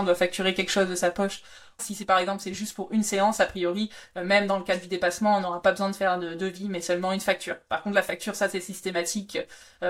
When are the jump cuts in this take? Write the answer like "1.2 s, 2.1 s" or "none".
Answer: 1.8 s